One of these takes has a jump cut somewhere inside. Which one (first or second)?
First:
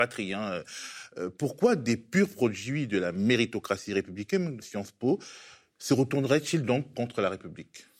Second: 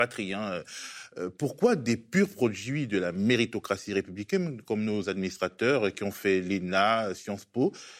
first